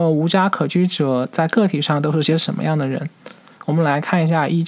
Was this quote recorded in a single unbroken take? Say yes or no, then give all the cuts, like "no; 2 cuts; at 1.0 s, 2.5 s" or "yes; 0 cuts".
yes; 0 cuts